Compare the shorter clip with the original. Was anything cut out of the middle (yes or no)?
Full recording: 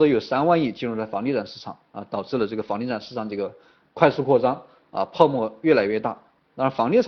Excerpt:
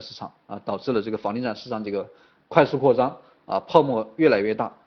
no